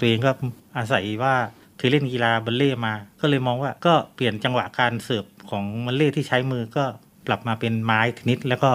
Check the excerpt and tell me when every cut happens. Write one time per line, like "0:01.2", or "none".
0:03.8